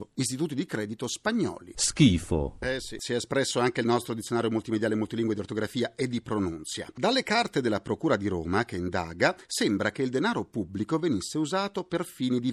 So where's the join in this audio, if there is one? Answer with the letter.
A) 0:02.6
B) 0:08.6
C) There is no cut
A